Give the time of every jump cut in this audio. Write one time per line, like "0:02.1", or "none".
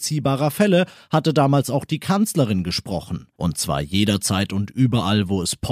0:03.4